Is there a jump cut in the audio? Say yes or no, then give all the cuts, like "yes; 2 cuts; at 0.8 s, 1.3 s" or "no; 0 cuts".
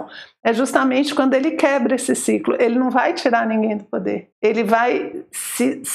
yes; 1 cut; at 4.3 s